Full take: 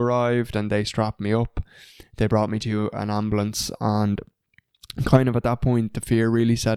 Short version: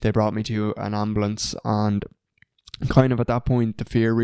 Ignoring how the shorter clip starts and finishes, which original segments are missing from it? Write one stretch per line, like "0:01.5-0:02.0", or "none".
none